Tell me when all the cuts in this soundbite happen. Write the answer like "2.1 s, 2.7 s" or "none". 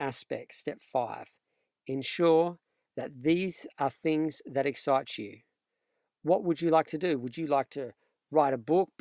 none